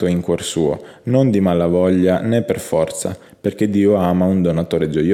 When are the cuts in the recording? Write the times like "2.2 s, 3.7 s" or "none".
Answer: none